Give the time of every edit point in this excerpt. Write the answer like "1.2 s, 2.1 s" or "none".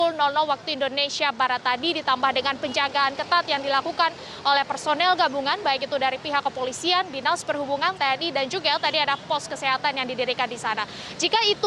8.0 s